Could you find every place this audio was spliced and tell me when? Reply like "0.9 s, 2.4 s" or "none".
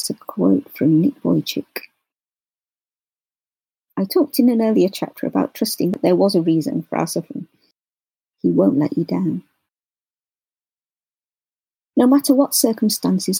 8.3 s, 11.9 s